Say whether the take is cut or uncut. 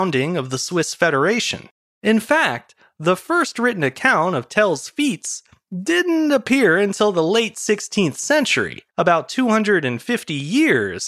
cut